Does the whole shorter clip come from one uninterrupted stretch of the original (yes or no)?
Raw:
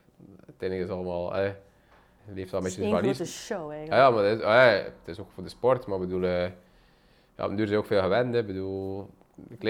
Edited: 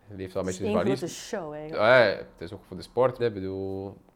no